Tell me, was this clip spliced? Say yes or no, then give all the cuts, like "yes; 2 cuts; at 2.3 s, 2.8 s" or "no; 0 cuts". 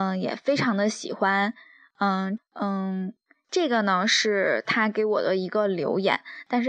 yes; 1 cut; at 2.4 s